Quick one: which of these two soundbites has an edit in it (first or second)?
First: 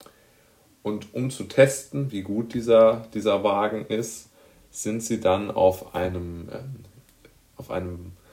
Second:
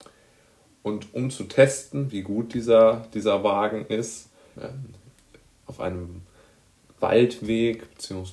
second